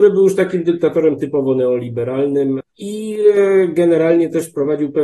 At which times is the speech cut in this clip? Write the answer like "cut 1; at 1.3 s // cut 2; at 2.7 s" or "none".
cut 1; at 2.6 s